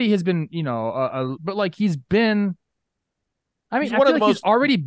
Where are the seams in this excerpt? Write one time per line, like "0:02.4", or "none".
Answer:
0:01.3